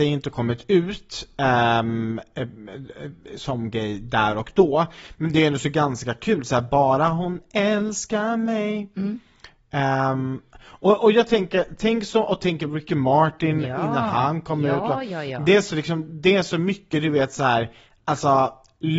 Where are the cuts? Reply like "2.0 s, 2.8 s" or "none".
none